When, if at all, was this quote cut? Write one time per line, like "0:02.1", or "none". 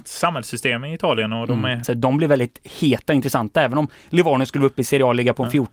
0:01.8